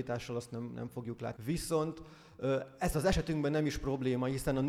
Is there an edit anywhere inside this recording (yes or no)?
yes